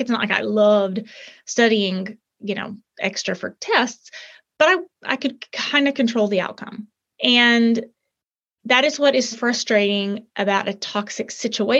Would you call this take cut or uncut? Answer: cut